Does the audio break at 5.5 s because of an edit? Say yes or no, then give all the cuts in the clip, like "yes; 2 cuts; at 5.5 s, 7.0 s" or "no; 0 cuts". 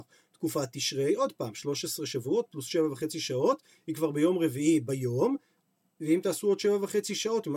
no; 0 cuts